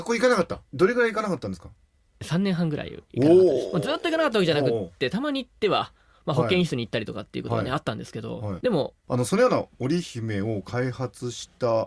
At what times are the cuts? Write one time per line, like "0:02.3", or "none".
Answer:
0:09.0